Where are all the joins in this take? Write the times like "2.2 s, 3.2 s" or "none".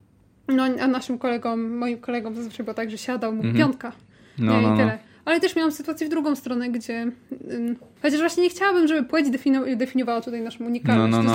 8.0 s